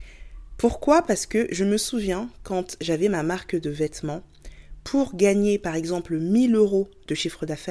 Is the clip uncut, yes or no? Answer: yes